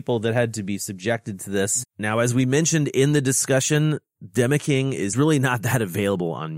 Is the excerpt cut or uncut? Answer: cut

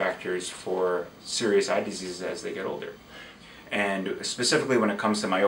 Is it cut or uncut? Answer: cut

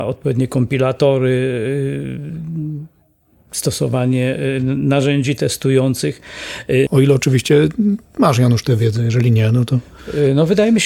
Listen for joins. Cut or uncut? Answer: cut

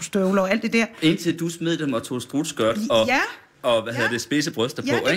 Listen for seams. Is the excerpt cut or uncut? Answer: uncut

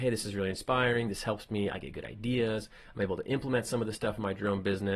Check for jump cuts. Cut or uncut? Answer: uncut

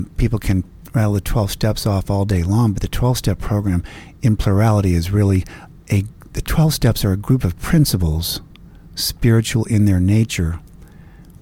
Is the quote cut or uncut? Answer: uncut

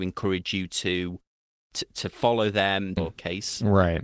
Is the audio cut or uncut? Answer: cut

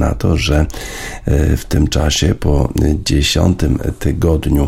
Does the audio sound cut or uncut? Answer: uncut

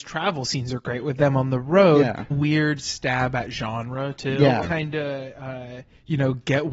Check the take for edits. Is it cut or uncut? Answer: cut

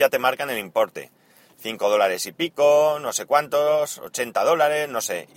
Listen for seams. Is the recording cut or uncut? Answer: uncut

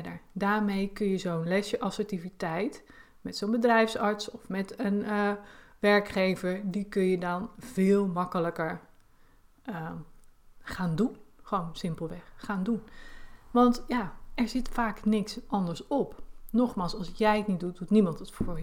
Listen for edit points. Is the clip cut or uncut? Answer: uncut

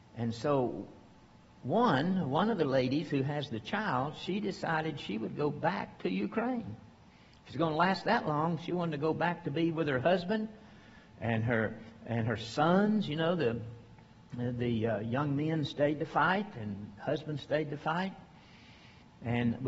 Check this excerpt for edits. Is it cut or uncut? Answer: uncut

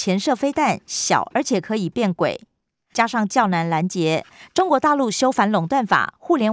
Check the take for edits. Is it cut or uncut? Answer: cut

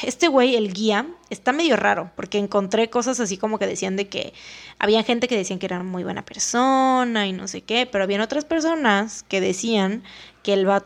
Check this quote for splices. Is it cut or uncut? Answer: uncut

